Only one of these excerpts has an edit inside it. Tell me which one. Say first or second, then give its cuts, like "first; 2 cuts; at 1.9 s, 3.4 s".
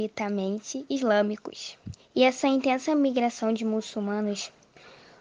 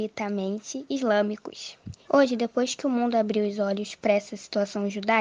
second; 1 cut; at 2.0 s